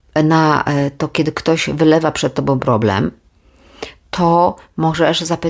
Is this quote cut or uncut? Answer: uncut